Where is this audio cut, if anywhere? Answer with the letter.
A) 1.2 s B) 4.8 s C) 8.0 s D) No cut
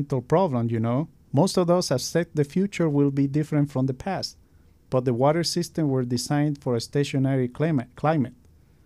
D